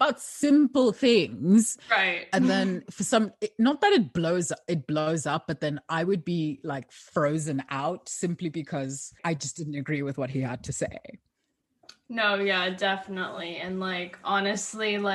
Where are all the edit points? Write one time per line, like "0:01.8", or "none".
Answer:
none

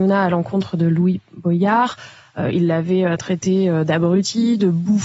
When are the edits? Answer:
none

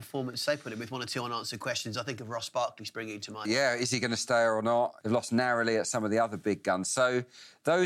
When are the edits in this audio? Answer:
0:03.4
0:05.0

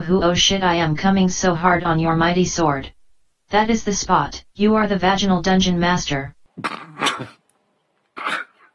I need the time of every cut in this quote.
0:04.5

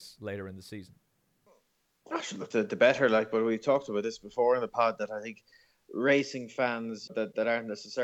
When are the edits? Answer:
0:02.5
0:07.1

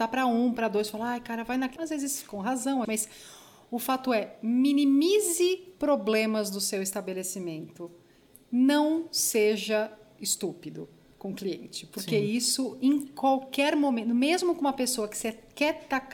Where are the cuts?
0:01.8
0:02.8

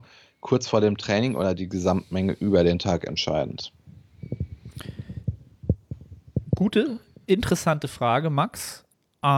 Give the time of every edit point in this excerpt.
none

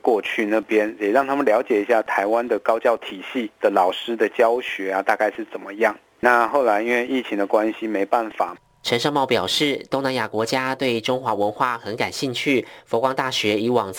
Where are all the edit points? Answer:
none

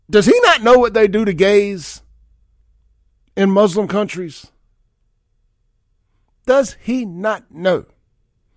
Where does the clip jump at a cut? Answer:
none

